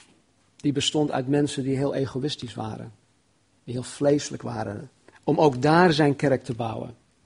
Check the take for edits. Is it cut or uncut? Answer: cut